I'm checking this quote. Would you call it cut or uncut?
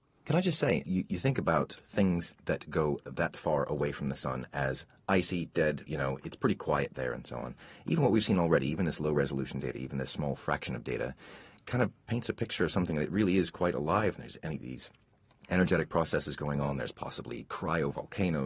cut